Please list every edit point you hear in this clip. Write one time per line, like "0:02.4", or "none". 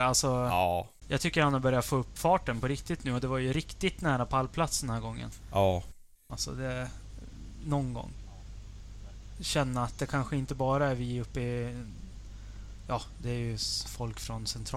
0:06.3